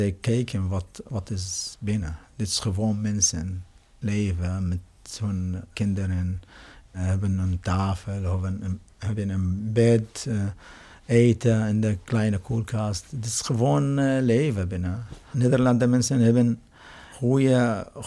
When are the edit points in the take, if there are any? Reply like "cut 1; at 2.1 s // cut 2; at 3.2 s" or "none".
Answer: none